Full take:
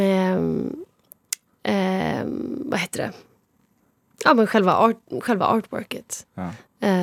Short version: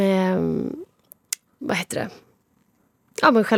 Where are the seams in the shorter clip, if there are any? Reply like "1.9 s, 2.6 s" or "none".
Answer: 1.6 s